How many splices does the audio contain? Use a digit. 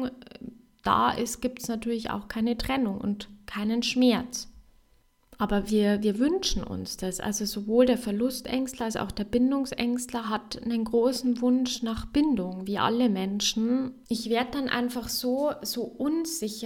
1